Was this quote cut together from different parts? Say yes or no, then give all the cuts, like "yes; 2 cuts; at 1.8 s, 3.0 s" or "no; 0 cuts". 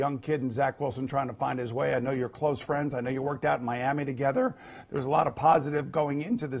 no; 0 cuts